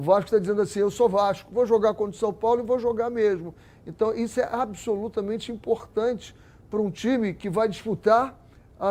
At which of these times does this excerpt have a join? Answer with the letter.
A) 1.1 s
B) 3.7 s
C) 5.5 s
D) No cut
D